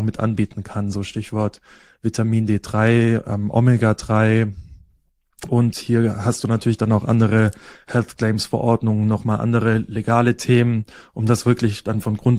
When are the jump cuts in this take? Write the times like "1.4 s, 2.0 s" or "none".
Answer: 5.5 s